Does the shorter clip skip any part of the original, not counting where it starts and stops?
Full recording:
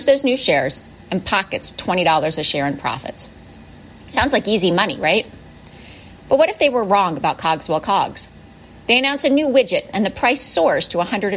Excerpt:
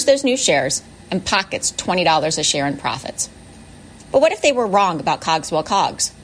yes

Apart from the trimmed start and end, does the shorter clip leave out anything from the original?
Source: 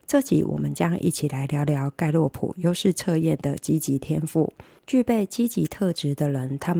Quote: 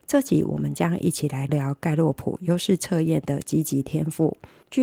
yes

